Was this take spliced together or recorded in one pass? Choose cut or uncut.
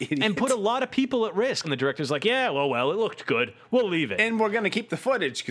cut